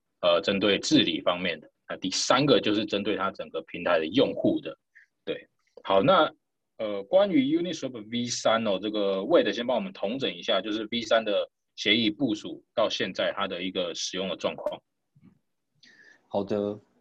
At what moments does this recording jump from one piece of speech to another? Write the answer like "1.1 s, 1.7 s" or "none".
none